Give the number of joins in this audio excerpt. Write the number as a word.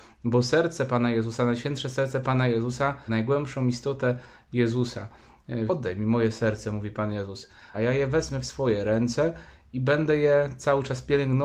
three